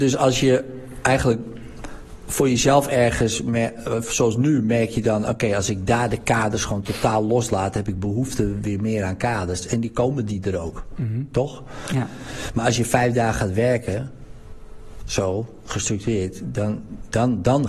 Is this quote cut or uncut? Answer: uncut